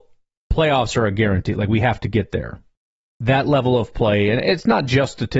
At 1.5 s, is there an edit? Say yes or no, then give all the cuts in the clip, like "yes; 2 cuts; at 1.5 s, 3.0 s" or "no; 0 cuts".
no; 0 cuts